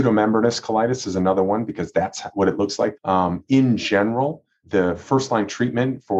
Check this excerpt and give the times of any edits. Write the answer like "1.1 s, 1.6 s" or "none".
3.0 s, 4.6 s